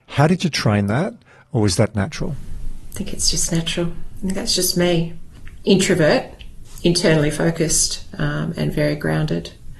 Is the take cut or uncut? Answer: uncut